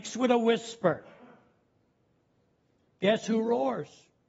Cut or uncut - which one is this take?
uncut